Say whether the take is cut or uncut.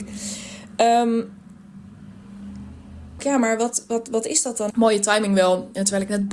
cut